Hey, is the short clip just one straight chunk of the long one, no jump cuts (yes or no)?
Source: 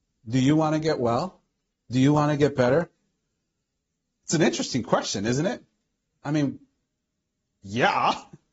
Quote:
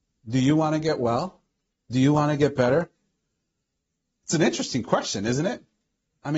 yes